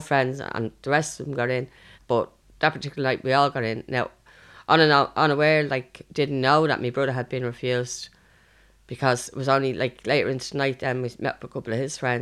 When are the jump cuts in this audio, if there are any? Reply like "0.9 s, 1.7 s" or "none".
2.0 s